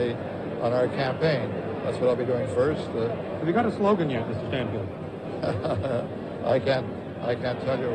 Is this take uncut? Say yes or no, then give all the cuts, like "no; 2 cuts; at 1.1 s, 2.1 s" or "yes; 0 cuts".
yes; 0 cuts